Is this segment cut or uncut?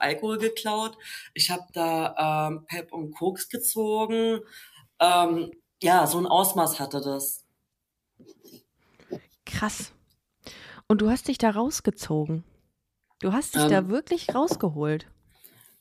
uncut